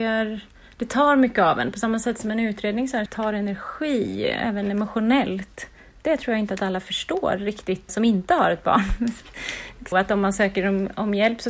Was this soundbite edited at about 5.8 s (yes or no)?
no